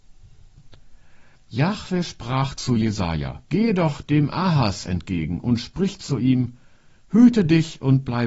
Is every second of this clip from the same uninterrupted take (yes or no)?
no